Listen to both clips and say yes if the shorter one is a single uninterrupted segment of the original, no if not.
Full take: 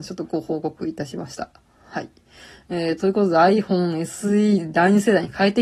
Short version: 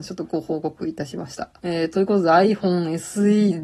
no